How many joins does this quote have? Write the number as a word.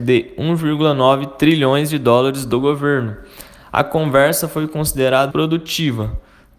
one